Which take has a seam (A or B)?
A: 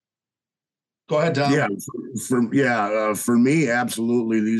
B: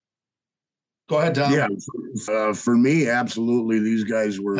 B